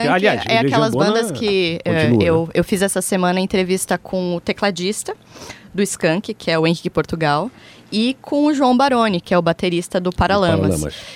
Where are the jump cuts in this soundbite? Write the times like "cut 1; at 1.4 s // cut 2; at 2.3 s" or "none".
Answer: none